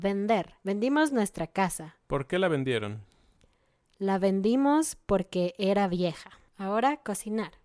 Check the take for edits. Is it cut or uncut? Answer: uncut